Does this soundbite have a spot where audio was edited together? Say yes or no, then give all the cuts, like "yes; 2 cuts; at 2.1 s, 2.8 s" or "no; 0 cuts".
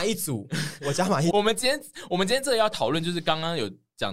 yes; 1 cut; at 1.3 s